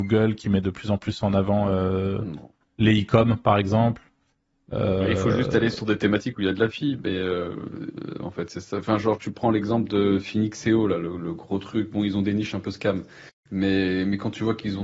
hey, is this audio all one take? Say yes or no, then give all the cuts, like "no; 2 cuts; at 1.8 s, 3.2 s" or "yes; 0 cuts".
yes; 0 cuts